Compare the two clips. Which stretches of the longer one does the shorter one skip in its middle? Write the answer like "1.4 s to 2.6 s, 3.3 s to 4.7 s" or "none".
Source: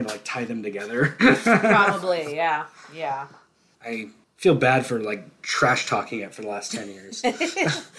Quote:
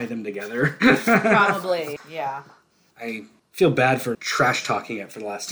2.4 s to 2.8 s, 5.0 s to 5.4 s